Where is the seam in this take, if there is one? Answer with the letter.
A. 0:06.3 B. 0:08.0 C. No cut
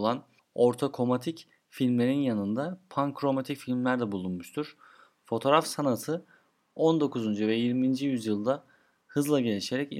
C